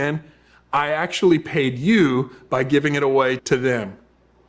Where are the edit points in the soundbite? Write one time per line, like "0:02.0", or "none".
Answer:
0:03.4